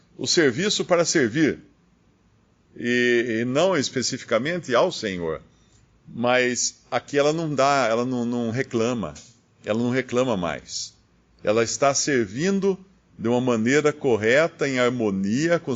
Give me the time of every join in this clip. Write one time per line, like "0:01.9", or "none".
0:02.6